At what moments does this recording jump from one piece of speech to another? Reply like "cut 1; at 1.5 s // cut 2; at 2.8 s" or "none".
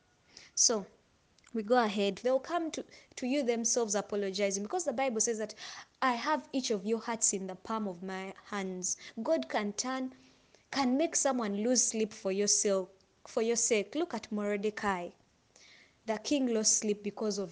cut 1; at 2.2 s